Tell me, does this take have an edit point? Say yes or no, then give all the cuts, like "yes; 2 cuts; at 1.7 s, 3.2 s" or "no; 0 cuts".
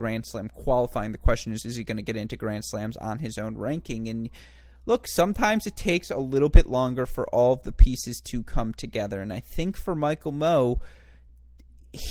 no; 0 cuts